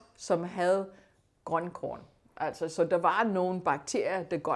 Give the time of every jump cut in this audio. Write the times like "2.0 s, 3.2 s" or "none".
none